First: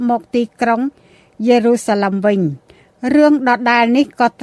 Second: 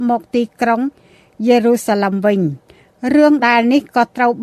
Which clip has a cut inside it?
second; 1 cut; at 3.4 s

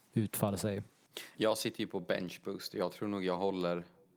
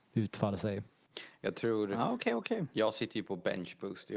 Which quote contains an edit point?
first; 1 cut; at 1.3 s

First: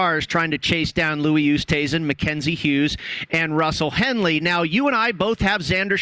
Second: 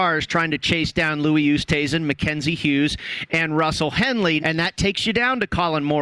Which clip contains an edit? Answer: second; 1 cut; at 4.4 s

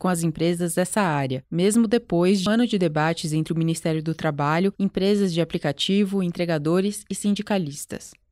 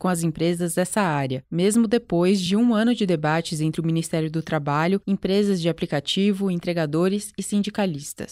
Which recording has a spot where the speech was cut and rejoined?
first; 1 cut; at 2.5 s

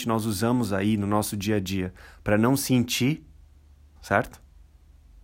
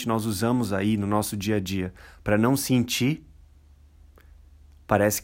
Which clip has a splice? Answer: first; 1 cut; at 4.0 s

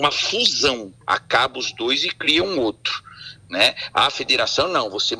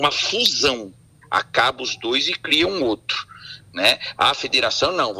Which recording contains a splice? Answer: first; 1 cut; at 1.0 s

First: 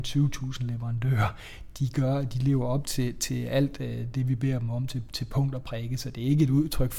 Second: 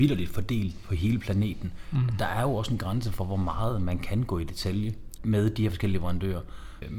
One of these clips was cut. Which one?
second; 1 cut; at 5.2 s

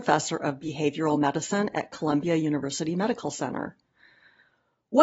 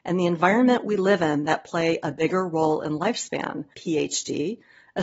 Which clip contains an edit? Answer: second; 1 cut; at 3.7 s

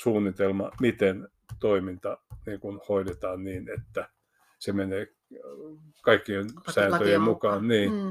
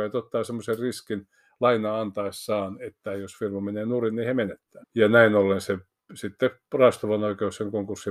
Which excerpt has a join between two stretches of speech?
second; 1 cut; at 4.8 s

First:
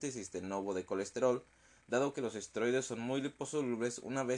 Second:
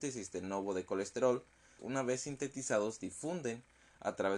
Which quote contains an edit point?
second; 1 cut; at 1.8 s

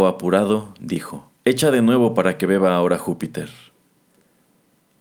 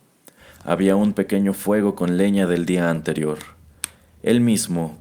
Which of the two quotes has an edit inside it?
first; 1 cut; at 1.3 s

